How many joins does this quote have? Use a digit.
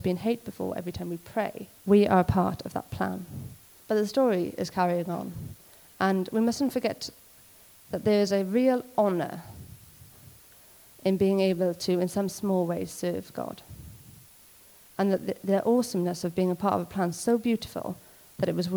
2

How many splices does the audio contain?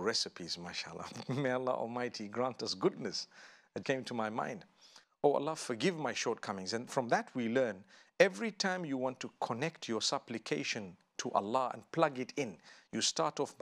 2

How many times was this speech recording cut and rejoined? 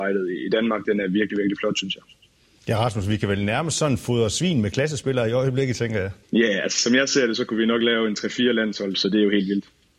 2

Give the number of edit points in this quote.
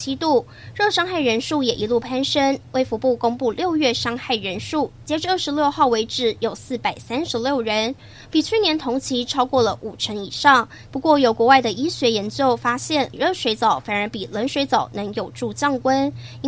1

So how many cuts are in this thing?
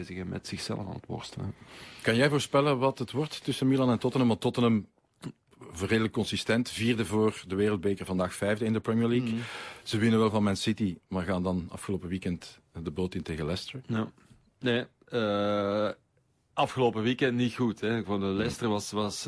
0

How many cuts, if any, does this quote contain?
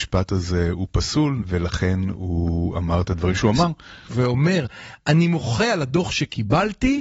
2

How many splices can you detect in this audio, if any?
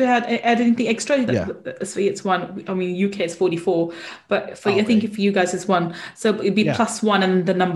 1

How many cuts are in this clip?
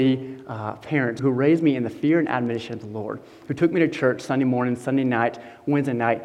1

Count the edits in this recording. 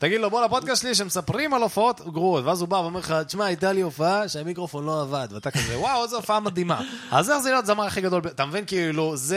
0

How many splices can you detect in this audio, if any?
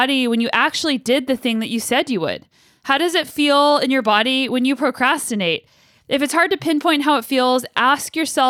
0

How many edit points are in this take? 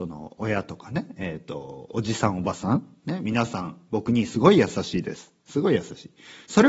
0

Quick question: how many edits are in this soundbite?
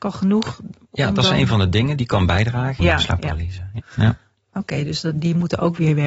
2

